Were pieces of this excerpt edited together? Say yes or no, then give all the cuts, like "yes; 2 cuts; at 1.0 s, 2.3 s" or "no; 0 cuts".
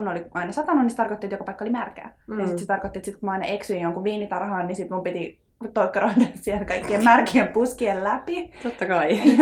yes; 1 cut; at 2.2 s